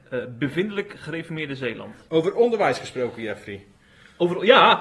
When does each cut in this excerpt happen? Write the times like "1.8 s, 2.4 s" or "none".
none